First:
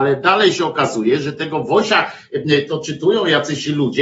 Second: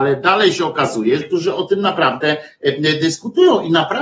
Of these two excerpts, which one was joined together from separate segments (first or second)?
second